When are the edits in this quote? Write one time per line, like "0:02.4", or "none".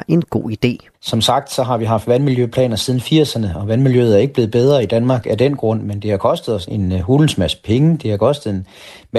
0:00.9
0:06.7